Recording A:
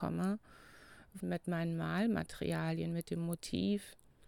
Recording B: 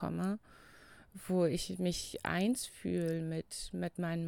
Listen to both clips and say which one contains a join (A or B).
A